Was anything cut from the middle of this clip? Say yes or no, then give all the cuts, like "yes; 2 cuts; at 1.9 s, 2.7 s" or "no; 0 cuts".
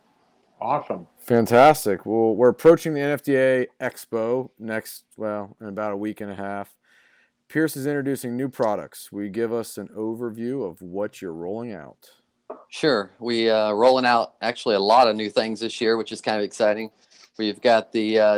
no; 0 cuts